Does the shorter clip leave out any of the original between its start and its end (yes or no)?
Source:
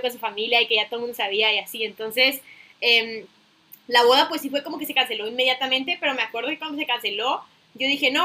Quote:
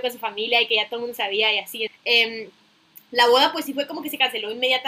yes